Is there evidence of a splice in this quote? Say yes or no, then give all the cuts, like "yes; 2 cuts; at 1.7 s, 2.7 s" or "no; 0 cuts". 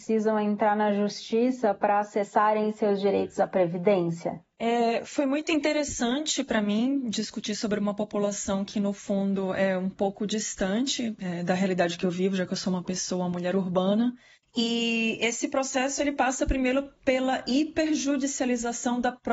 no; 0 cuts